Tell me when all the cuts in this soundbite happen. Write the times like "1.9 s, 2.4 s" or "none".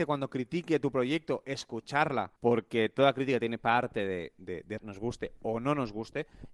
2.4 s, 4.8 s